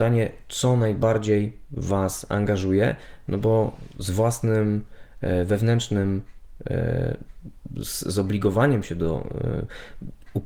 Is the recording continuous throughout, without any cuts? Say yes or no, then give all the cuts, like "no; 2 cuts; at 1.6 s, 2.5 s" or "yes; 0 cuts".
yes; 0 cuts